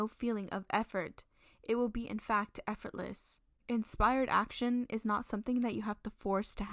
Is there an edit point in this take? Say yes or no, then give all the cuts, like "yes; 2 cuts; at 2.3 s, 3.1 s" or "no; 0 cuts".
no; 0 cuts